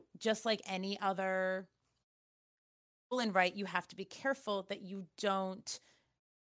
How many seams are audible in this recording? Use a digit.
0